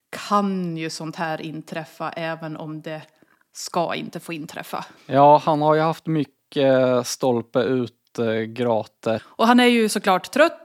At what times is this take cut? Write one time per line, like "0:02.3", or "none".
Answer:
0:05.0
0:09.2